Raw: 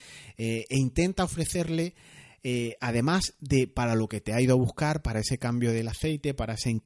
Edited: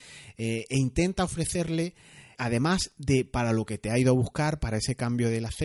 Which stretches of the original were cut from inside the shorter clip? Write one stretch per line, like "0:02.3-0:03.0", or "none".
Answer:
0:02.3-0:02.8